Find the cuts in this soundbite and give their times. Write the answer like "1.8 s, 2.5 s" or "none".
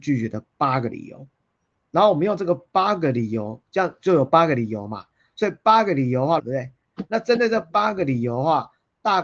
6.4 s